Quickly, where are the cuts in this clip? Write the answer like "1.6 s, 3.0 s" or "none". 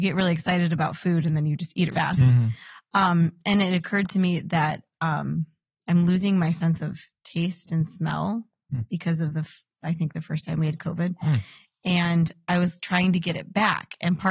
1.9 s

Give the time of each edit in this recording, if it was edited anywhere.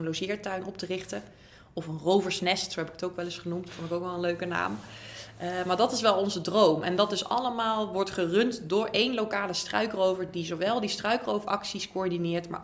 none

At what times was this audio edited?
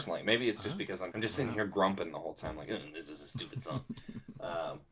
1.1 s

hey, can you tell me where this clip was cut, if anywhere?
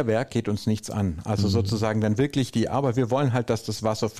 none

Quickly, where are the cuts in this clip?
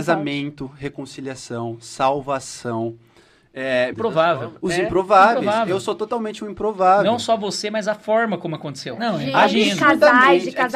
3.9 s, 9.0 s

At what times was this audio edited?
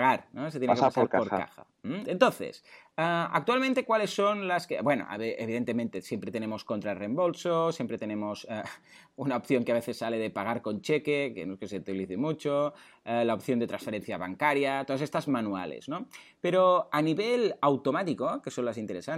2.0 s

